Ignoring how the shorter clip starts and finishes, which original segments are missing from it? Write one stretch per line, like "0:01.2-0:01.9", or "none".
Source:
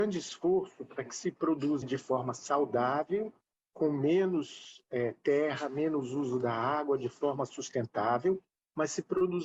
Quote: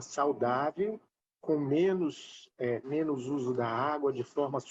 0:05.2-0:05.7